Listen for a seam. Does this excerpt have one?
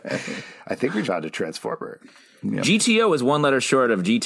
yes; 1 cut; at 1.0 s

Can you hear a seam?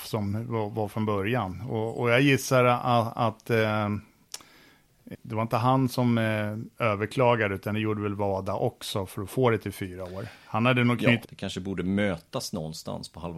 yes; 2 cuts; at 5.1 s, 11.2 s

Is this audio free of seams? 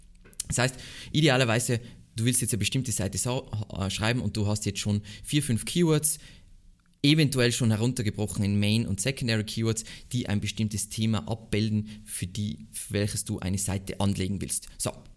yes; 0 cuts

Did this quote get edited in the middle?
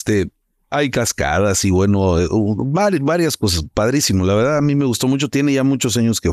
no; 0 cuts

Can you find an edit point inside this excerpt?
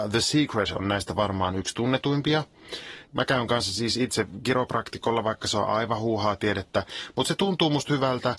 yes; 1 cut; at 3.0 s

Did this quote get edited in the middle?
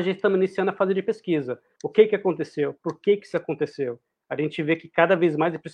yes; 1 cut; at 1.8 s

